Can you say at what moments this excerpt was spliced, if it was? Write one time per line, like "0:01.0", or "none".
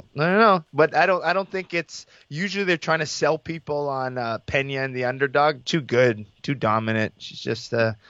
0:05.6